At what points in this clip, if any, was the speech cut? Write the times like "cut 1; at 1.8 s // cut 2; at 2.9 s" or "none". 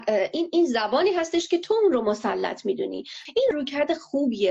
cut 1; at 3.5 s